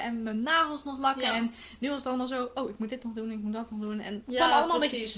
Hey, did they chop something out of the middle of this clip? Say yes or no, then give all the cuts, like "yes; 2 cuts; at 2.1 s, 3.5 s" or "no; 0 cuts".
no; 0 cuts